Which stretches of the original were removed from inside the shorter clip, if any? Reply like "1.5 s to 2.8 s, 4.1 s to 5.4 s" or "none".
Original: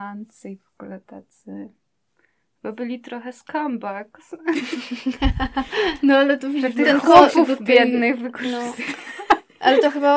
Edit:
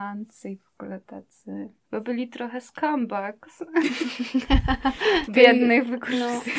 1.8 s to 2.5 s, 6.0 s to 7.6 s